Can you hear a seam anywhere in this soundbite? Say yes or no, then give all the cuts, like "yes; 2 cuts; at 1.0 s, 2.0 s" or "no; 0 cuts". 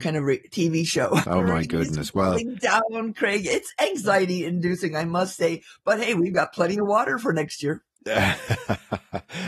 yes; 1 cut; at 1.2 s